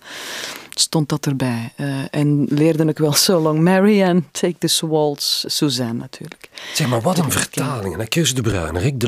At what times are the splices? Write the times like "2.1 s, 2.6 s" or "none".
none